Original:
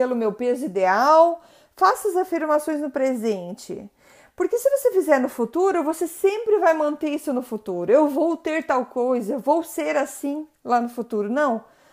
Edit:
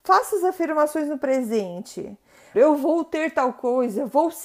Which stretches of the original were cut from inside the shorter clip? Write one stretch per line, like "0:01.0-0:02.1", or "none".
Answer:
0:04.3-0:07.9